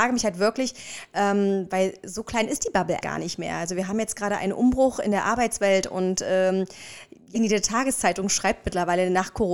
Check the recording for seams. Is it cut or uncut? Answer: cut